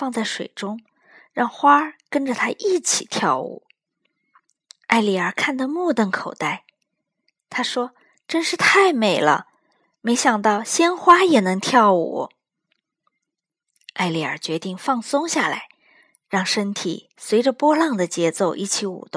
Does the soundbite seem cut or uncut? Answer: cut